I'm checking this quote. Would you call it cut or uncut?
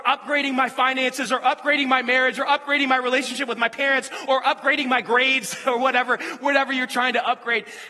uncut